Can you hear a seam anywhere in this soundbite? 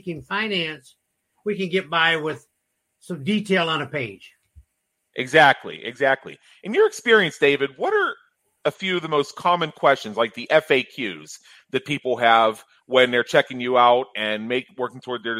no; 0 cuts

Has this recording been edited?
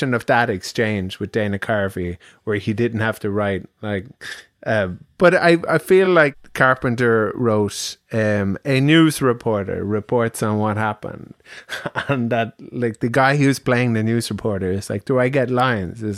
no; 0 cuts

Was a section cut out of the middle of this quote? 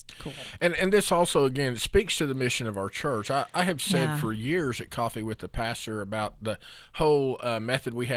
no; 0 cuts

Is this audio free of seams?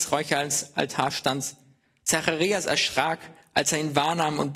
yes; 0 cuts

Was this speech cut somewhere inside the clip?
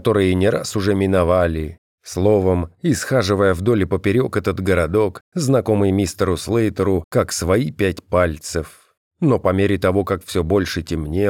no; 0 cuts

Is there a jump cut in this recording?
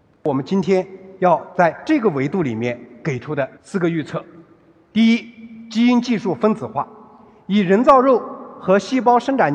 yes; 1 cut; at 3.6 s

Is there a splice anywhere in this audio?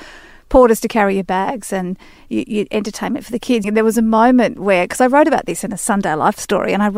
yes; 1 cut; at 3.6 s

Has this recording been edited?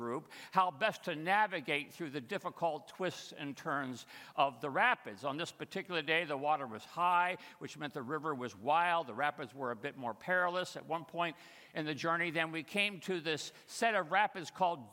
no; 0 cuts

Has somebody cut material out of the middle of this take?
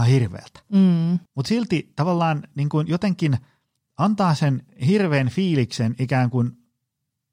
yes; 1 cut; at 1.3 s

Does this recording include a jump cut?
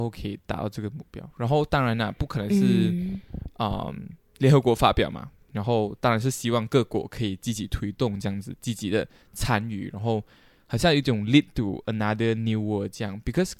no; 0 cuts

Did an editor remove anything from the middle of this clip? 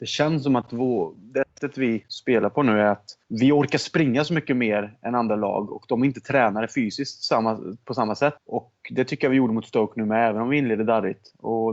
yes; 2 cuts; at 3.2 s, 8.4 s

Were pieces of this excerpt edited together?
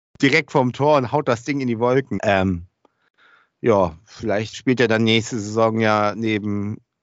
yes; 2 cuts; at 2.2 s, 4.5 s

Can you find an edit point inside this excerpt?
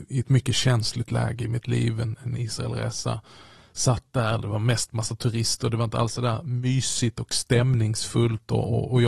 no; 0 cuts

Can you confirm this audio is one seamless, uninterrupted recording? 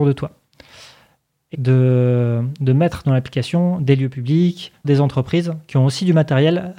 no; 2 cuts; at 1.5 s, 4.8 s

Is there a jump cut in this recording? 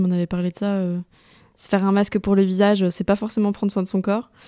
no; 0 cuts

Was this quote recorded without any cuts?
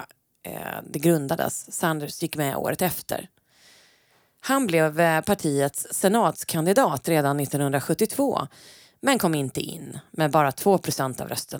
yes; 0 cuts

